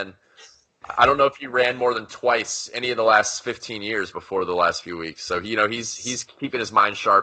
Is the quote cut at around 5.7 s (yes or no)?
no